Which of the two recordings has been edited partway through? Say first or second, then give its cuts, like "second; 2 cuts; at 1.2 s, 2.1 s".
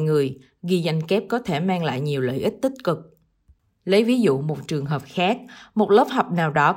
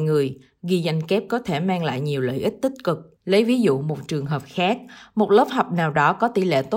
second; 1 cut; at 3.2 s